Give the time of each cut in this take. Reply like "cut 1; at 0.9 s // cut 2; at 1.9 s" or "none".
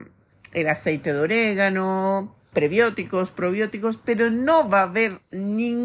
cut 1; at 2.5 s